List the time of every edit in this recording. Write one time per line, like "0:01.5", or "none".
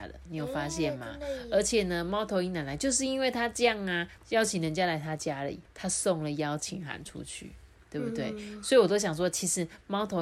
0:04.2
0:05.7